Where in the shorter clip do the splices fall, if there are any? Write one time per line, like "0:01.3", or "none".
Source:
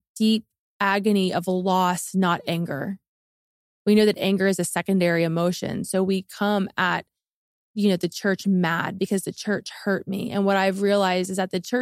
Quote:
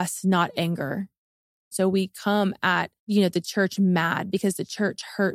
0:01.7
0:03.0